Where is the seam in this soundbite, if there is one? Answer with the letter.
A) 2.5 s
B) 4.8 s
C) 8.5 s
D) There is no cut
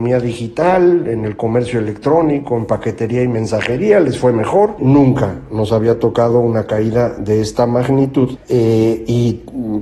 B